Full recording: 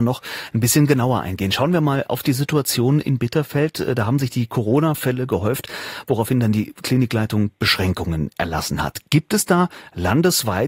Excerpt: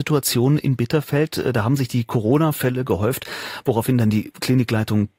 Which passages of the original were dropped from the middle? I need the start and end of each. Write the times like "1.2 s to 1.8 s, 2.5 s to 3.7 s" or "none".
none